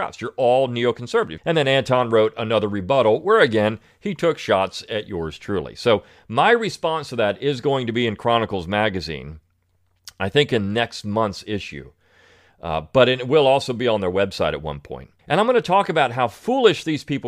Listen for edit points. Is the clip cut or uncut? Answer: cut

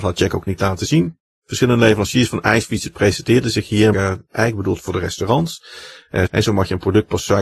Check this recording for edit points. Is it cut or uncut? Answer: cut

